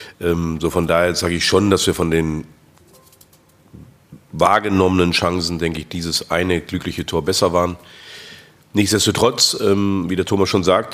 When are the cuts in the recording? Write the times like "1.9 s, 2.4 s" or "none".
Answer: none